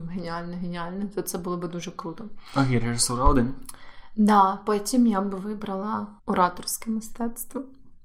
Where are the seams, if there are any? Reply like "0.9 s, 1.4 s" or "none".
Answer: 6.2 s